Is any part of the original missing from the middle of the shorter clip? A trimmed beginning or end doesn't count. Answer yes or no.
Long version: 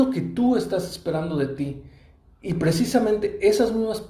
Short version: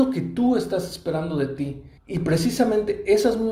yes